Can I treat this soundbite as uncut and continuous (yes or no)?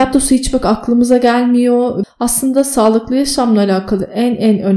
no